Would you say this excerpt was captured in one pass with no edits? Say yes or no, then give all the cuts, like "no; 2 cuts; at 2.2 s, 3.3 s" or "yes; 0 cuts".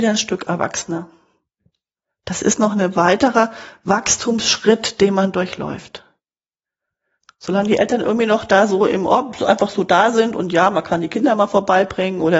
yes; 0 cuts